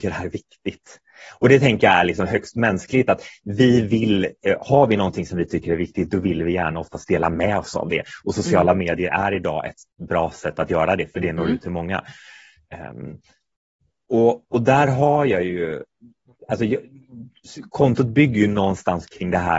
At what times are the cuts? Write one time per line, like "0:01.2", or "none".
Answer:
none